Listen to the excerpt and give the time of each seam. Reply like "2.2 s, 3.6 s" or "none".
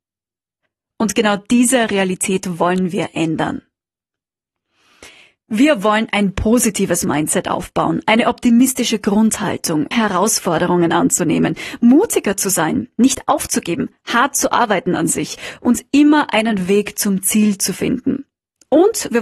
9.9 s

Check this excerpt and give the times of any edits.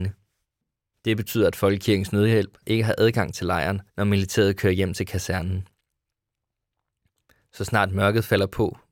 0.9 s, 2.6 s, 3.9 s

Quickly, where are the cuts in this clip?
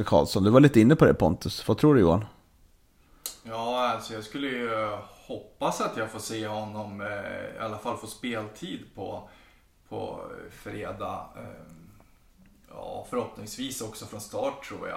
none

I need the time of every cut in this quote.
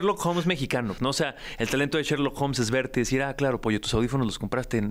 1.0 s

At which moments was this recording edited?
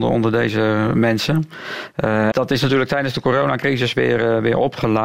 2.3 s

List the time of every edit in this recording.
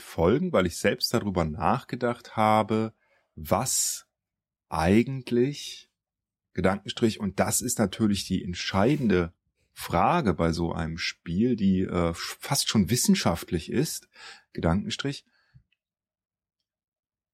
none

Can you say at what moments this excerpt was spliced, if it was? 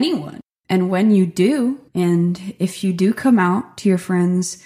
1.9 s

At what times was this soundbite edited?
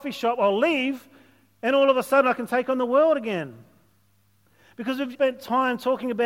5.1 s

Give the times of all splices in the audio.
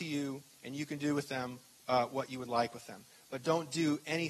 none

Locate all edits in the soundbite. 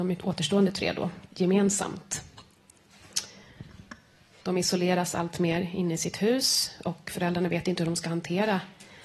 4.4 s

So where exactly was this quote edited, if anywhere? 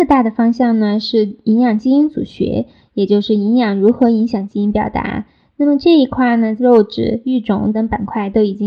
6.6 s, 7.7 s

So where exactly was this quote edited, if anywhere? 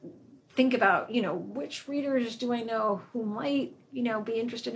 none

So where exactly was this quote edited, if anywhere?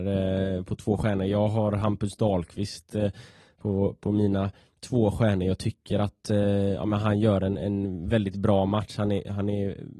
none

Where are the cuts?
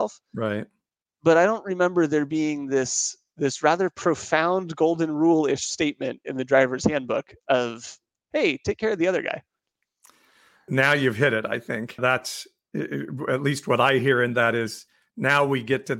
10.7 s, 12.0 s

